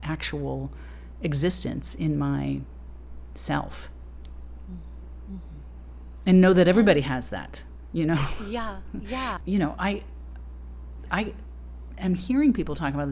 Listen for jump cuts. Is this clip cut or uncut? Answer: cut